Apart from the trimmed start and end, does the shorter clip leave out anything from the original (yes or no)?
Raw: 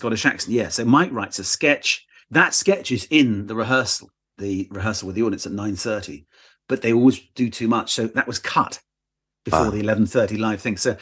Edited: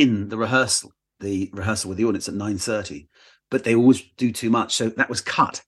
no